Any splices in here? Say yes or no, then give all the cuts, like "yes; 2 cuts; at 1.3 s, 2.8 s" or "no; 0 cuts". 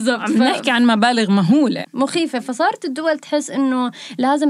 yes; 1 cut; at 1.8 s